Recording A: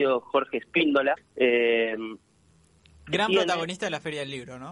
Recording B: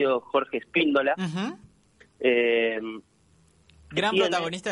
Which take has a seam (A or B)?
A